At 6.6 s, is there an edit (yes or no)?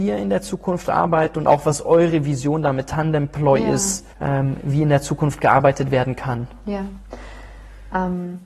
no